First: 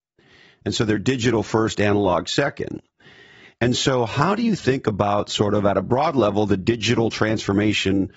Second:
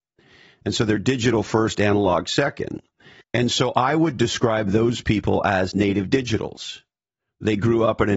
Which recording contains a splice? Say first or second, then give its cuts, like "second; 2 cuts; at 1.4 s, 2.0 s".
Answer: second; 1 cut; at 3.2 s